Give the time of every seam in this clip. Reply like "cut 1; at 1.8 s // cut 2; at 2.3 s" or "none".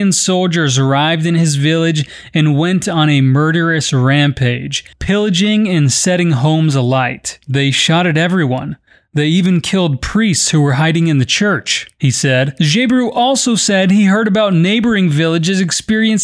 cut 1; at 4.9 s